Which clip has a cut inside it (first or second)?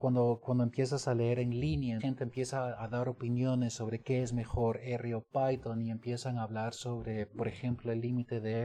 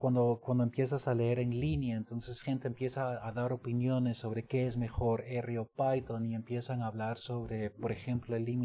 first